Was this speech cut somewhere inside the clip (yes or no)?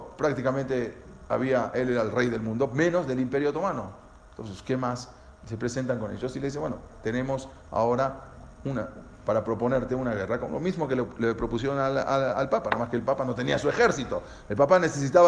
no